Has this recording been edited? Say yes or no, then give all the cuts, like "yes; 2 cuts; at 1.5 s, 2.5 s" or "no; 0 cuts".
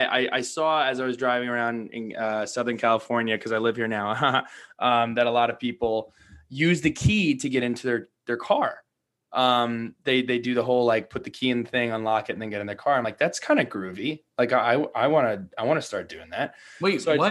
no; 0 cuts